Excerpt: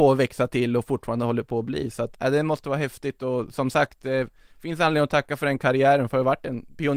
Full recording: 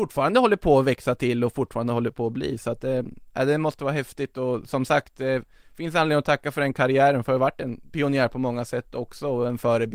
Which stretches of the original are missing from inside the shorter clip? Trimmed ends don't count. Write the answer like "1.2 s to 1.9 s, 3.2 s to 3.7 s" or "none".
2.8 s to 3.3 s

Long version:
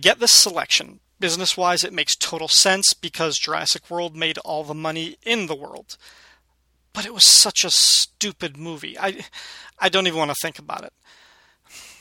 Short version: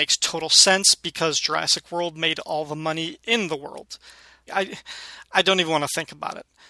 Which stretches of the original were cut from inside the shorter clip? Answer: 6.5 s to 8.9 s

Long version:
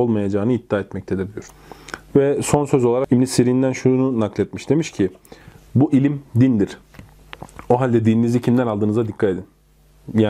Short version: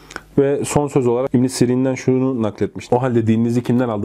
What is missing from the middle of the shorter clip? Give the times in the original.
4.7 s to 7.7 s

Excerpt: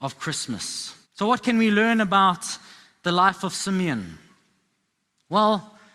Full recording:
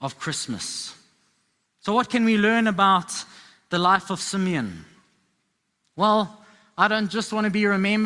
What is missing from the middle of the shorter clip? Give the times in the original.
1.0 s to 1.7 s

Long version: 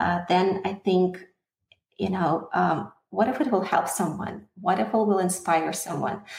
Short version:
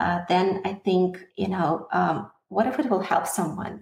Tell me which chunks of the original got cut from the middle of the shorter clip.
1.3 s to 1.9 s

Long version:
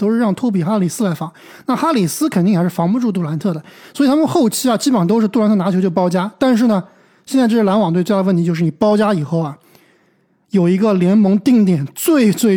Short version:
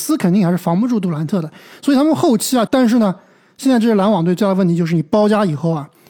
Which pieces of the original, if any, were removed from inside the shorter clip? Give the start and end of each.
4.8 s to 6.4 s

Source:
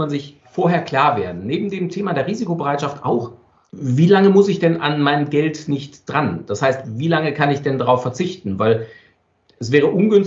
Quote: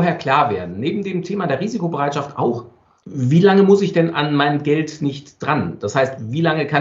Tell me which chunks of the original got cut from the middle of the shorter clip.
none

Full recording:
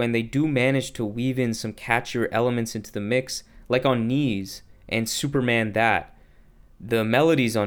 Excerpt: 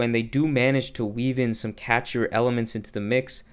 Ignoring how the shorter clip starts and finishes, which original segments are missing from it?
none

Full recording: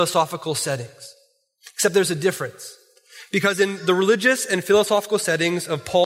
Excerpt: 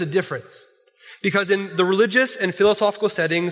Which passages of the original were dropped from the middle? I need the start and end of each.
none

